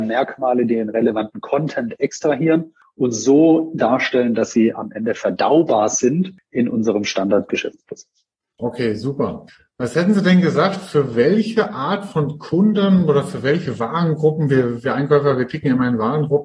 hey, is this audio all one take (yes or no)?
yes